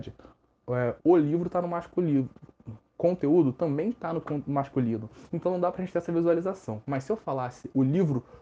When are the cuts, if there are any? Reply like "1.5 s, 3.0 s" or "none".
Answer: 1.0 s